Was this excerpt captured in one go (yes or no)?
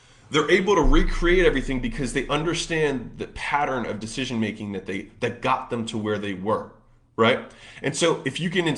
yes